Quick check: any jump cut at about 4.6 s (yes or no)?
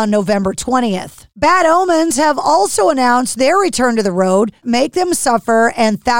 yes